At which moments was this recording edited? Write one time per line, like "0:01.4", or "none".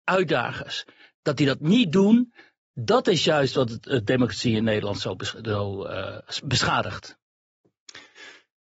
none